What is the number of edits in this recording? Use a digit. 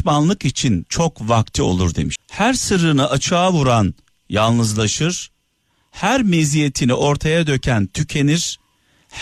1